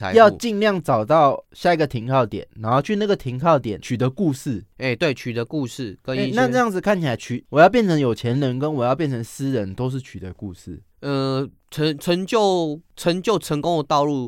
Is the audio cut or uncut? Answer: uncut